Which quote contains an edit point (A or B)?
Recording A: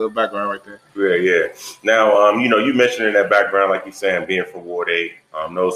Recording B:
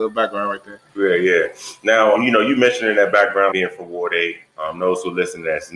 B